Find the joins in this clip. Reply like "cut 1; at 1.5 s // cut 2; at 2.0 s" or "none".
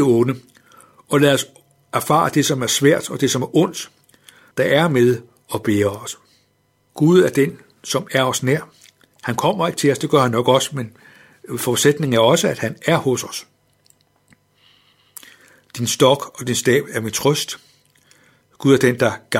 cut 1; at 4.5 s // cut 2; at 6.9 s